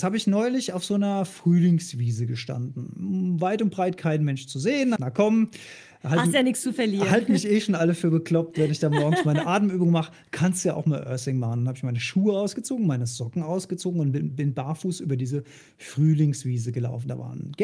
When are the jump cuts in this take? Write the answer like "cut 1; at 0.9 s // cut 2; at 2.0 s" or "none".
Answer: cut 1; at 5.0 s